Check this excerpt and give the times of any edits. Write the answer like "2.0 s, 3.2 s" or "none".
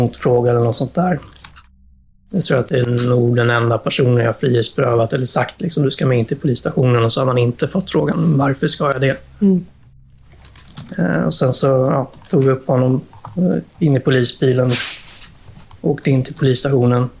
none